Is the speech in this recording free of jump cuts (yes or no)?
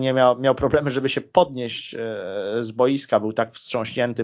yes